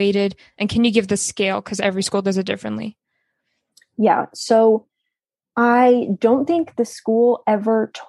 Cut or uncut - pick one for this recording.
uncut